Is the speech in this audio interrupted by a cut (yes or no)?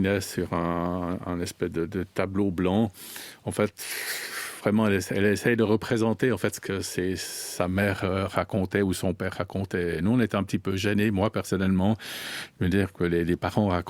no